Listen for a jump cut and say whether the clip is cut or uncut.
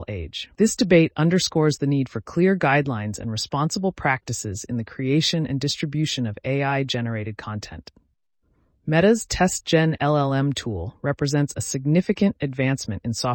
uncut